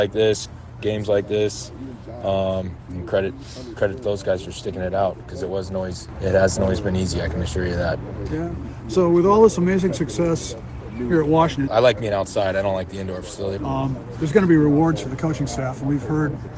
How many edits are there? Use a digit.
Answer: 2